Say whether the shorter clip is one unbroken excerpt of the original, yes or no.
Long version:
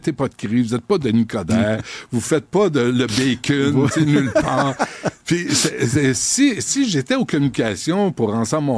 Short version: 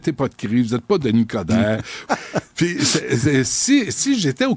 no